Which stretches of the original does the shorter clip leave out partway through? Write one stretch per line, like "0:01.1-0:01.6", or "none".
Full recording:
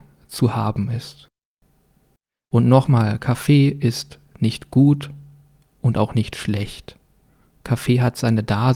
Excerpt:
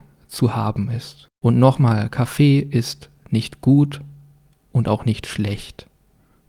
0:01.4-0:02.4